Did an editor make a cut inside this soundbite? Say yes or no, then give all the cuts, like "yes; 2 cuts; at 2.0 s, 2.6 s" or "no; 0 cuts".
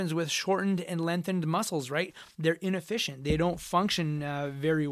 no; 0 cuts